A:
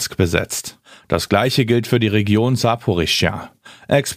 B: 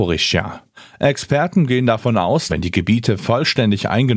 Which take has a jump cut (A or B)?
B